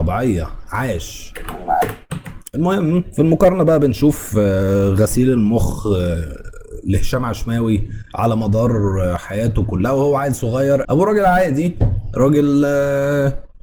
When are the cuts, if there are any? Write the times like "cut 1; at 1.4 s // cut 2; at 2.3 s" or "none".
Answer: cut 1; at 10.8 s